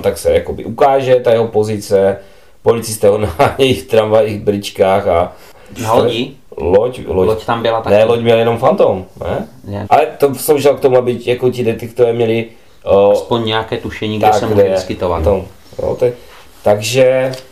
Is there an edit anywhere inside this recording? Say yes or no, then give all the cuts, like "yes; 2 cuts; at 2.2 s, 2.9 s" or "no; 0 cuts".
yes; 3 cuts; at 6.5 s, 9.8 s, 15.2 s